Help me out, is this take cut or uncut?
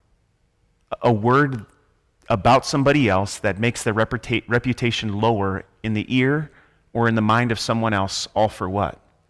uncut